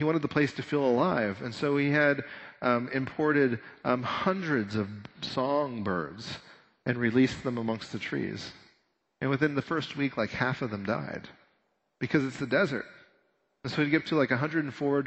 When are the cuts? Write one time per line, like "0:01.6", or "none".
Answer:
none